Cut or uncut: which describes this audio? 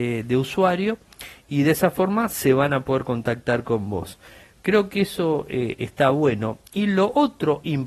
uncut